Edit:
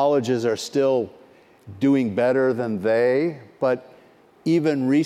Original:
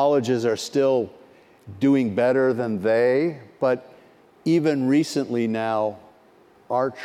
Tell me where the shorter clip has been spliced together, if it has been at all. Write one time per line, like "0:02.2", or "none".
none